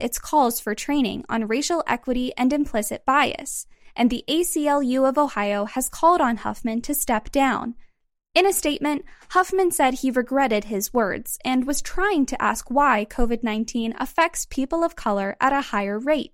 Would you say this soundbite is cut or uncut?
uncut